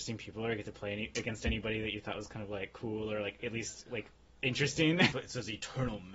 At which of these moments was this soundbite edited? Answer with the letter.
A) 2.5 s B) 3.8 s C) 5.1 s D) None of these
C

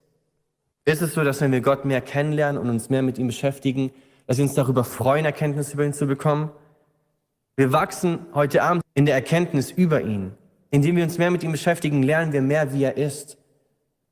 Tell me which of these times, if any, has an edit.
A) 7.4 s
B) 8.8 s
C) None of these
B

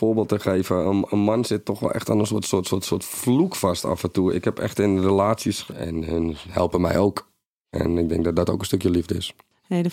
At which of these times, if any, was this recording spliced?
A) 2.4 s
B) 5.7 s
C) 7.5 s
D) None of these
B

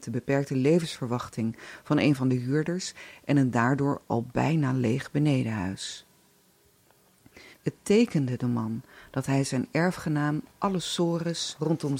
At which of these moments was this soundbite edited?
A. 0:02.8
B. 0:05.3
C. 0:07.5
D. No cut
C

